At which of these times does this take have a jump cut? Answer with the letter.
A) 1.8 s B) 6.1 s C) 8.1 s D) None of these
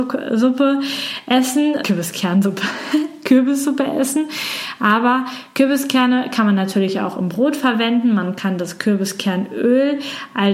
A